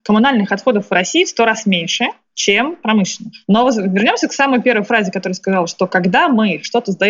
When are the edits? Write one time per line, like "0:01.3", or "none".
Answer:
none